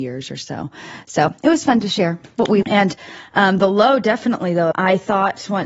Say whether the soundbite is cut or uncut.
cut